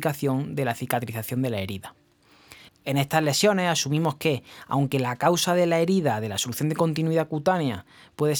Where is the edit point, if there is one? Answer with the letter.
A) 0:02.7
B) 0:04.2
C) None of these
A